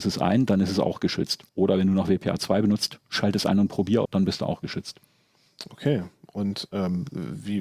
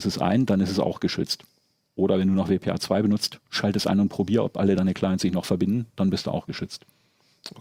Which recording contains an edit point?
first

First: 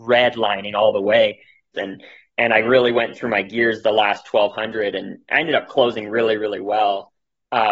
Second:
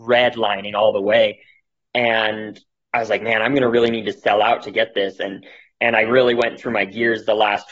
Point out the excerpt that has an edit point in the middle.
first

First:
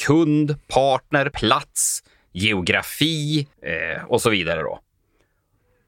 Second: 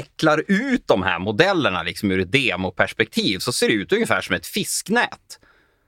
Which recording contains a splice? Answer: first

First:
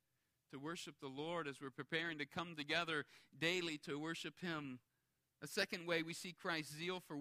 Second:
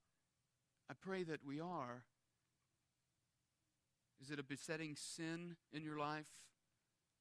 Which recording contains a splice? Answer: second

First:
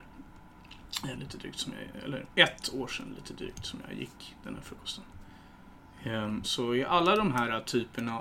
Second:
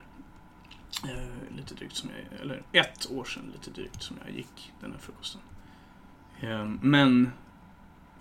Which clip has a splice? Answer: first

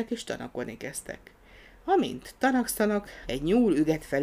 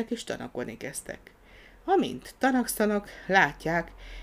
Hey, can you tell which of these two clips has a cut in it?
first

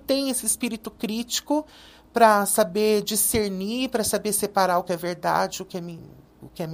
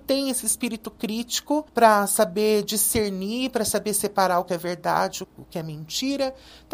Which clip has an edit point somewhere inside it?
second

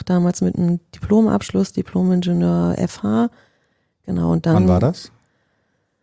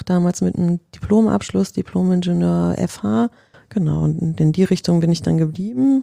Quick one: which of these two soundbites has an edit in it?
second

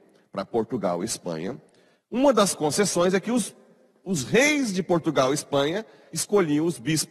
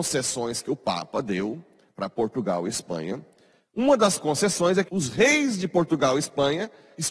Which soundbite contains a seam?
second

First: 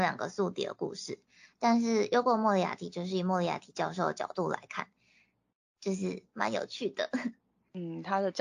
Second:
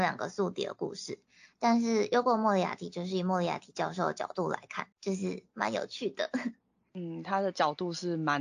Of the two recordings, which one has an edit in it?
second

